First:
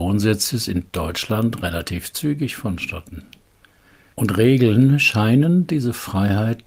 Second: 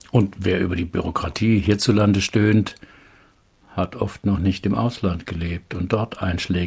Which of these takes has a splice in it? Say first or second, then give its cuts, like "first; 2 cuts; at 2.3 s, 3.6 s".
first; 1 cut; at 4.1 s